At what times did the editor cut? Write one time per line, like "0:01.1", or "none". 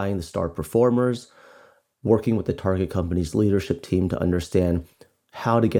none